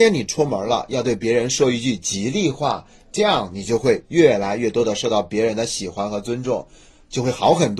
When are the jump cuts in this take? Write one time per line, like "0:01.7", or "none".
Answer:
none